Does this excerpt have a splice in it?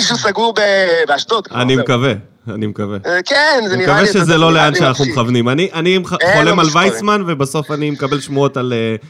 no; 0 cuts

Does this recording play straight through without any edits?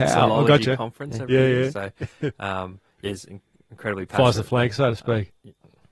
yes; 0 cuts

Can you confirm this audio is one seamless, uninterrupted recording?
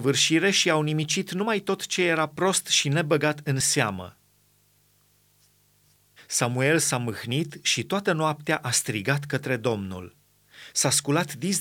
no; 1 cut; at 6.2 s

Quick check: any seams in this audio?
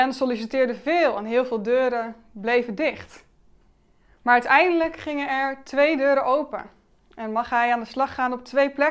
no; 0 cuts

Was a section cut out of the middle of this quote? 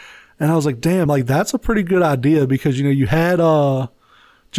no; 0 cuts

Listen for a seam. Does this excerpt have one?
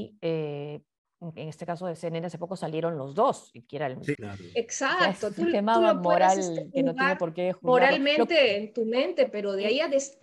yes; 1 cut; at 4.1 s

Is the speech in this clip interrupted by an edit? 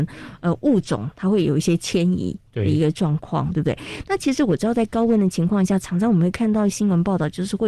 no; 0 cuts

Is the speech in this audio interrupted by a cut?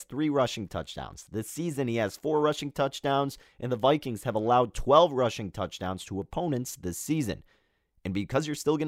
no; 0 cuts

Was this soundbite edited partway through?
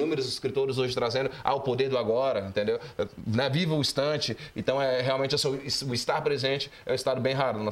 no; 0 cuts

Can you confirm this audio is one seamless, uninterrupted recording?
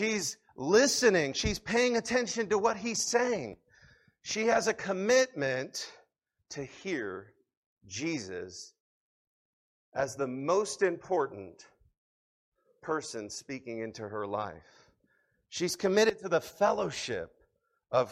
yes; 0 cuts

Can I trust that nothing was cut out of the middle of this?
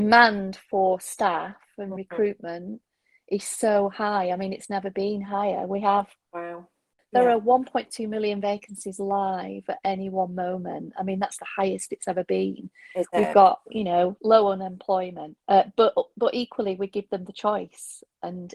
no; 2 cuts; at 14.2 s, 15.4 s

